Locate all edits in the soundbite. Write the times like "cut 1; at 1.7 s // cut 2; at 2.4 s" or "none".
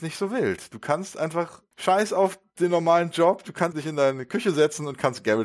cut 1; at 1.7 s // cut 2; at 3.7 s